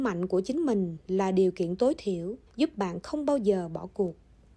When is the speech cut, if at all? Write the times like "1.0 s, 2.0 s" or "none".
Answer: 2.5 s